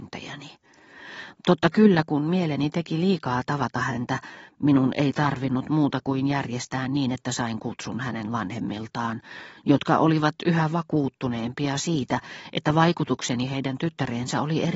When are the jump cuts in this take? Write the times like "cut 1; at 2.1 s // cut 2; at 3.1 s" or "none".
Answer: none

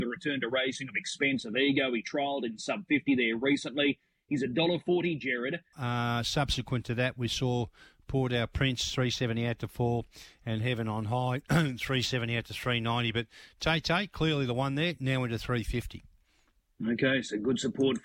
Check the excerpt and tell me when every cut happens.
cut 1; at 5.7 s

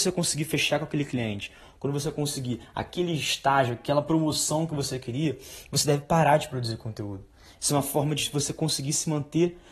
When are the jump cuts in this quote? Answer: none

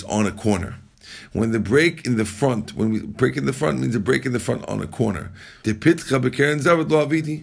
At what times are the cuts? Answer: cut 1; at 5.6 s

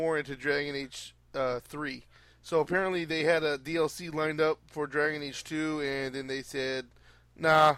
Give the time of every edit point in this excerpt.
none

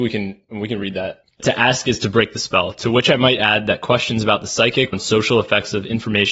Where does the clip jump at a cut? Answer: cut 1; at 1.4 s // cut 2; at 4.9 s

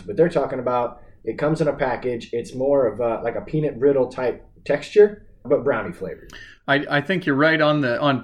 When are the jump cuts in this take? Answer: cut 1; at 5.4 s

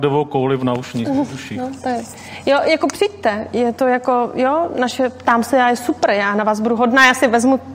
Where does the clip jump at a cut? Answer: none

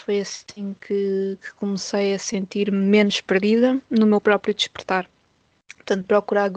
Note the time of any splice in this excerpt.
none

